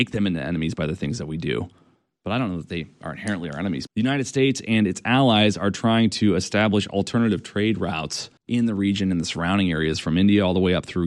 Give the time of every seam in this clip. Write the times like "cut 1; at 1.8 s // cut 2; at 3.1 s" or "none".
cut 1; at 3.9 s // cut 2; at 8.4 s